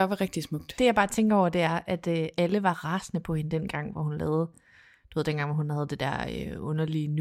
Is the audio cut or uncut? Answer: uncut